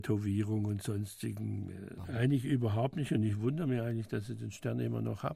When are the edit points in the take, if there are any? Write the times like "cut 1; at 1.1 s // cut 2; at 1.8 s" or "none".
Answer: cut 1; at 2.0 s